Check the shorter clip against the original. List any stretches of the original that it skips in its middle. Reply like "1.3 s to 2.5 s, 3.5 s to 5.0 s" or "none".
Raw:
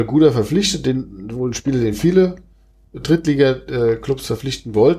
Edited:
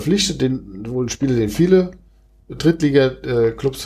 none